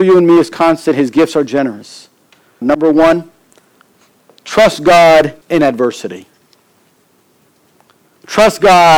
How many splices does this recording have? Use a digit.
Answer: 2